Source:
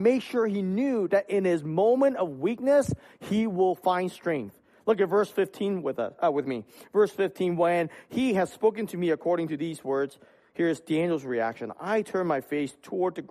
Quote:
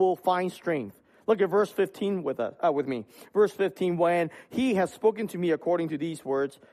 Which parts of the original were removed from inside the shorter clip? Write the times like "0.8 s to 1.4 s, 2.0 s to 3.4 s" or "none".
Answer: none